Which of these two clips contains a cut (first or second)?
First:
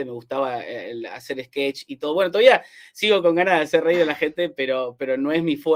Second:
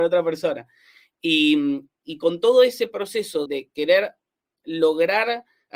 second